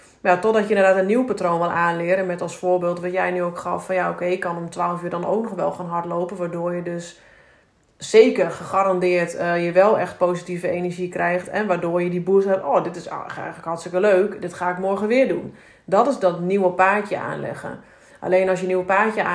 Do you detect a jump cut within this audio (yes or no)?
no